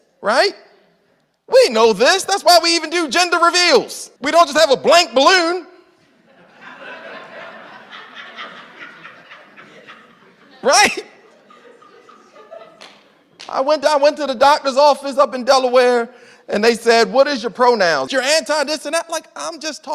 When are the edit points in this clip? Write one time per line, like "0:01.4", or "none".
0:04.2
0:13.8
0:18.1